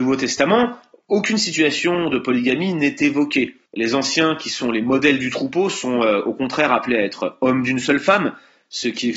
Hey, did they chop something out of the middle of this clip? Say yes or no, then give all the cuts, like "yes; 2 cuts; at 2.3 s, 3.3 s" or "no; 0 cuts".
yes; 1 cut; at 3.7 s